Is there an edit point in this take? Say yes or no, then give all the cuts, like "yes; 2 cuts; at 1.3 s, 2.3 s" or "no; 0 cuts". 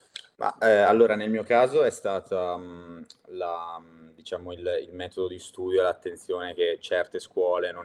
no; 0 cuts